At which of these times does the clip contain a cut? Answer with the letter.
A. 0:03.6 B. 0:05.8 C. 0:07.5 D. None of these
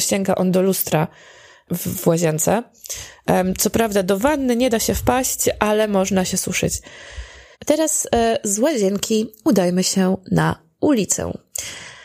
C